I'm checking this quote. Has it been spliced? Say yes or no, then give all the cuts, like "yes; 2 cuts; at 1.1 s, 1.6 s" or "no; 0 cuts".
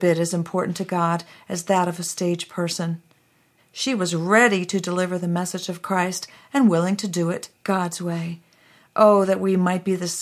yes; 1 cut; at 3.6 s